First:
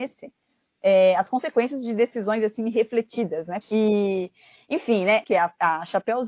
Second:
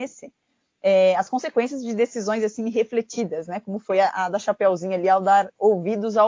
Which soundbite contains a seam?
first; 2 cuts; at 3.6 s, 5.2 s

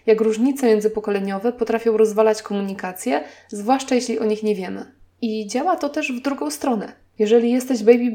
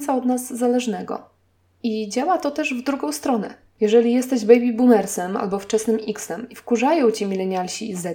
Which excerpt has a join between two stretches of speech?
first; 1 cut; at 5.1 s

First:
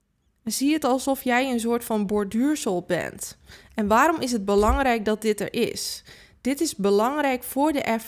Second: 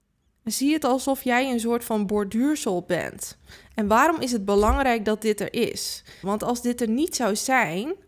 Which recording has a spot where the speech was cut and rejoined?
second; 1 cut; at 6.2 s

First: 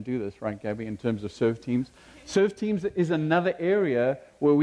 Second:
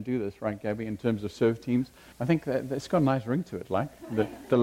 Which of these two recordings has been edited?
second; 1 cut; at 2.1 s

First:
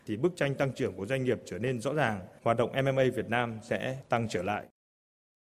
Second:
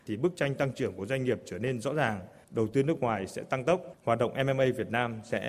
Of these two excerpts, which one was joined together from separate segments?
first; 1 cut; at 2.4 s

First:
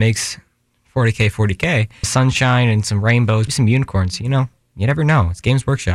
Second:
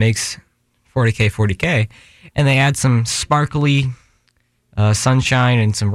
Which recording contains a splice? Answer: first; 2 cuts; at 2.0 s, 3.5 s

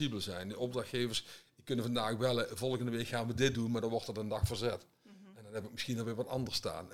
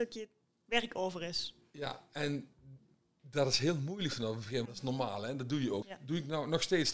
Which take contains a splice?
second; 2 cuts; at 4.6 s, 5.8 s

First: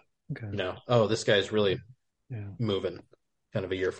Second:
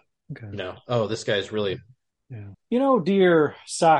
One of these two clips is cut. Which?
second; 1 cut; at 2.5 s

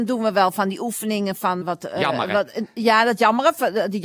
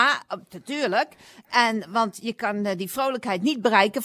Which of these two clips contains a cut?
first; 1 cut; at 1.6 s

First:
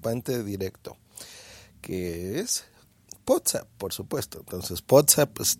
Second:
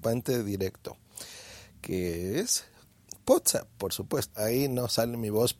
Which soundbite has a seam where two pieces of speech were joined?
second; 1 cut; at 4.3 s

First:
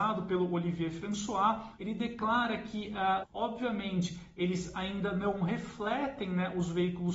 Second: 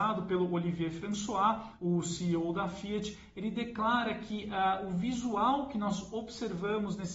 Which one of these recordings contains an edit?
first; 2 cuts; at 1.8 s, 3.2 s

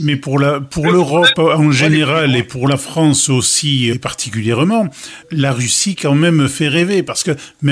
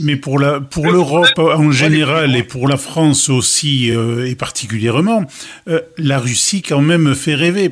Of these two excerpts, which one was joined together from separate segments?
first; 2 cuts; at 3.9 s, 5.2 s

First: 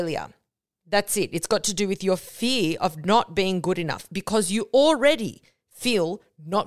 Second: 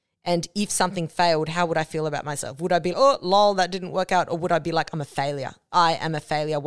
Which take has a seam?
second; 1 cut; at 2.9 s

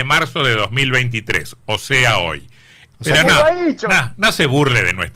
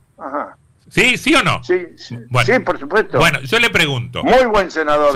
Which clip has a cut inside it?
first; 1 cut; at 2.9 s

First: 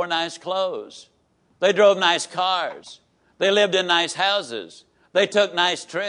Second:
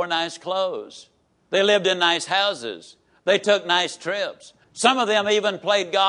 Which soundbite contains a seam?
second; 2 cuts; at 1.5 s, 4.6 s

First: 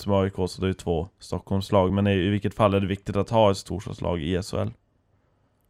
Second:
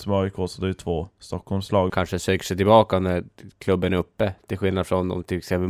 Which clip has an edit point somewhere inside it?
second; 1 cut; at 1.9 s

